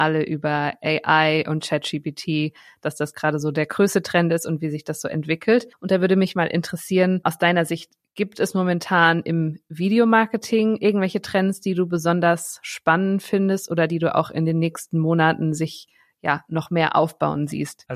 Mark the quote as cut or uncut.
uncut